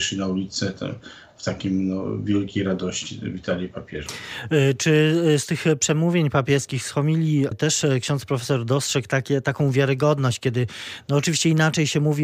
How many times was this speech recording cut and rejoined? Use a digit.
1